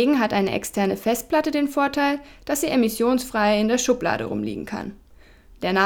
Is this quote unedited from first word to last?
yes; 0 cuts

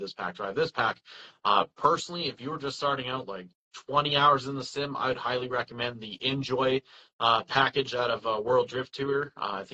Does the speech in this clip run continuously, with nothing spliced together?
yes; 0 cuts

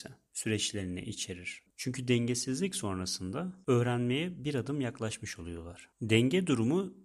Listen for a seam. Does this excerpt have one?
yes; 2 cuts; at 1.7 s, 5.9 s

